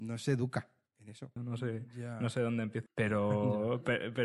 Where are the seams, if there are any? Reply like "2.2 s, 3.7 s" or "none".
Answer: 1.4 s, 2.9 s